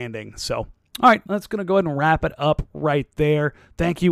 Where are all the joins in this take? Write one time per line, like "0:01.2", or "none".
0:01.2